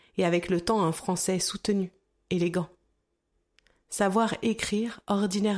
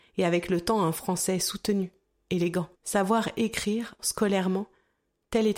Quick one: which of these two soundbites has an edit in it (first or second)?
second